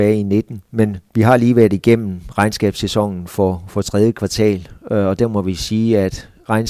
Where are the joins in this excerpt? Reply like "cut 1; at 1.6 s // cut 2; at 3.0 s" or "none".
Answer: none